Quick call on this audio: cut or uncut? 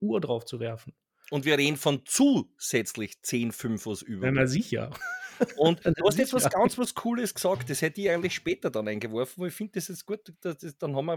uncut